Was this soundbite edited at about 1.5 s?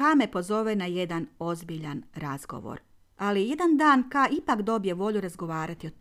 no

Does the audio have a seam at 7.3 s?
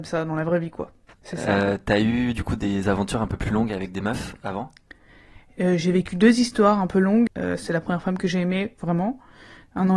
yes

